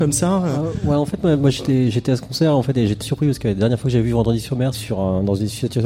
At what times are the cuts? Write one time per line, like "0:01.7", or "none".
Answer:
0:03.0
0:04.7